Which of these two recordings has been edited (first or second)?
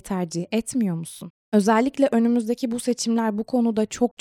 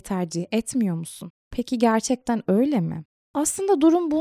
second